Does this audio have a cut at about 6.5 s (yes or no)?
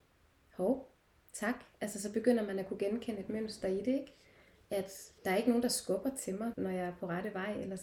yes